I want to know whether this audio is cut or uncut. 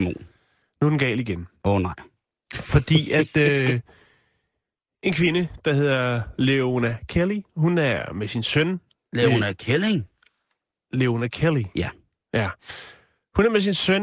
uncut